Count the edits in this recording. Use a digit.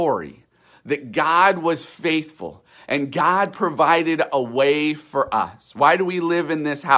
0